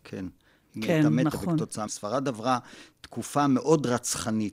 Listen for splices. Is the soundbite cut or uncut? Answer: cut